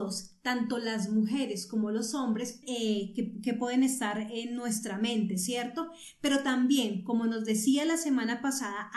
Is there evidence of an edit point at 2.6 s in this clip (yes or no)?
yes